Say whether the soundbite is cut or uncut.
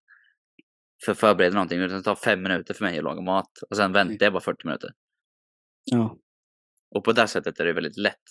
uncut